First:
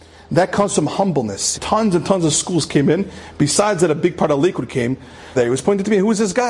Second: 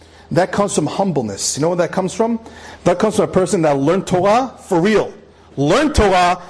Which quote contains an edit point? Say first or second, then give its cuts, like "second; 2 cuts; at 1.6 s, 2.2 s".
first; 2 cuts; at 1.5 s, 5.4 s